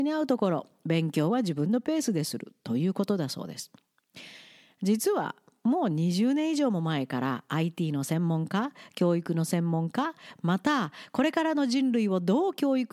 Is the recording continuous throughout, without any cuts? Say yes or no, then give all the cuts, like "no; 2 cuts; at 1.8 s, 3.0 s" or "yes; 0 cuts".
yes; 0 cuts